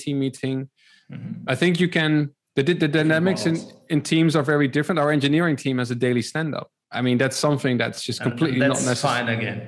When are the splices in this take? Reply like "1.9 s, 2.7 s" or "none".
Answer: none